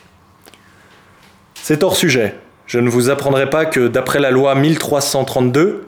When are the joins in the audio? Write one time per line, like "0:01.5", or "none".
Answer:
none